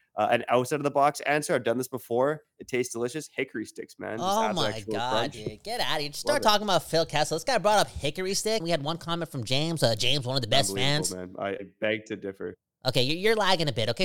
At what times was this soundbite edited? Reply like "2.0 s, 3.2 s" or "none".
8.6 s